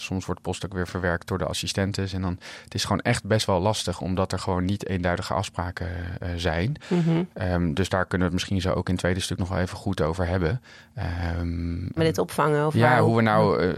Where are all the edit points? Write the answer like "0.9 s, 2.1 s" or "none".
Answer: 12.0 s